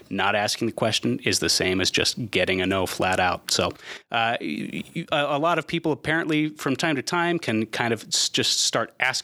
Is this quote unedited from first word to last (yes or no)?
yes